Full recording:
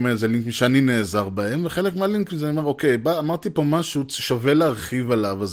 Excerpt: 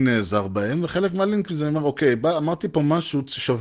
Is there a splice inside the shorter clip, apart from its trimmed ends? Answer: no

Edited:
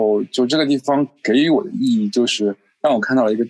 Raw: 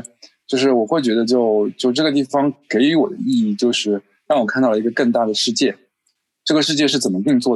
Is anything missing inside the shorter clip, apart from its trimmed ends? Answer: no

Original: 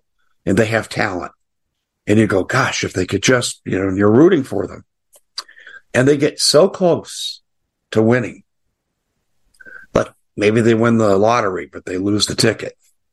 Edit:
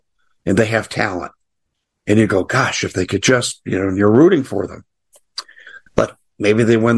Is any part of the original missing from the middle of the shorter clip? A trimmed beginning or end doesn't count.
yes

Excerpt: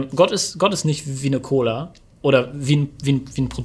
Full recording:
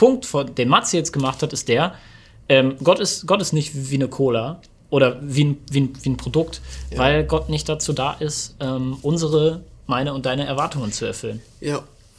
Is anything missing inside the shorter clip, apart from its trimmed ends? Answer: no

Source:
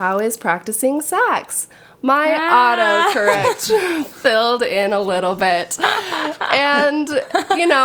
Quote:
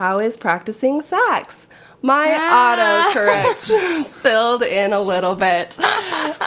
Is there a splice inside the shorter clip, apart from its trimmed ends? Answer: no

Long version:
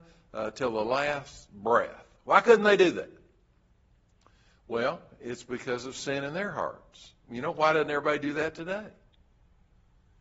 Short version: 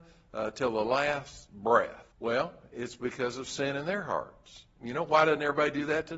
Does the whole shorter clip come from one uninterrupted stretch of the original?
no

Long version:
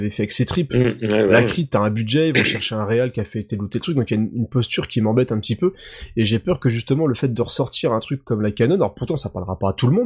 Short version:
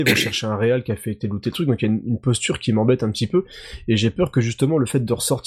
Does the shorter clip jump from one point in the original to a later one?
no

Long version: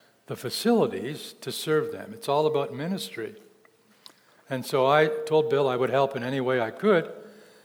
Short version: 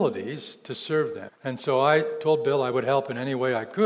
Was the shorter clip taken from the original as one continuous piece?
no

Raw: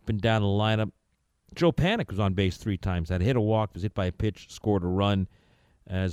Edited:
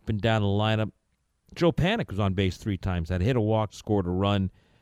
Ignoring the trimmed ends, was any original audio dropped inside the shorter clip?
yes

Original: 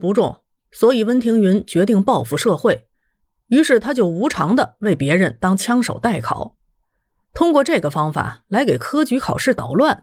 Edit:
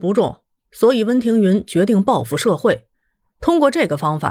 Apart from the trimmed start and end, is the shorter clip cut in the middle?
yes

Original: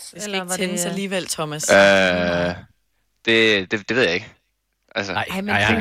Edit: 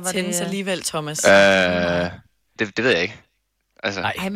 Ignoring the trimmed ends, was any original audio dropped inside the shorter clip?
yes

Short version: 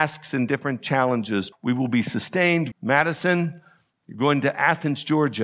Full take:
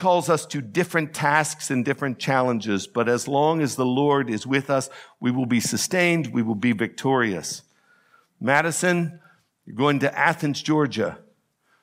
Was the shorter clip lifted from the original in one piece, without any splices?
no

